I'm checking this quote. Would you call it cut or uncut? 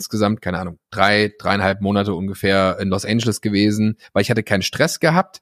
cut